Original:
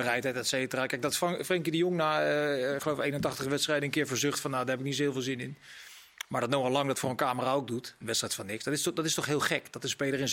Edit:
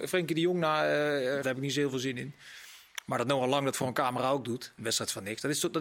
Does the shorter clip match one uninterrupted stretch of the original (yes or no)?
no